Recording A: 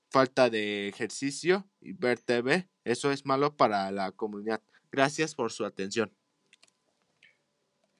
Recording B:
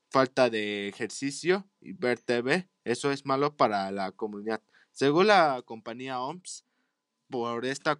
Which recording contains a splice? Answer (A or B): A